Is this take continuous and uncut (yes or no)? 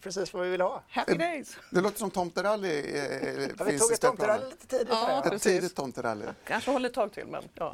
yes